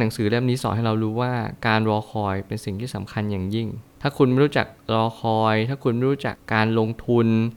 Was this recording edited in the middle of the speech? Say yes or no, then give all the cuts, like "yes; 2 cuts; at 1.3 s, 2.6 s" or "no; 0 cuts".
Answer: yes; 1 cut; at 6.4 s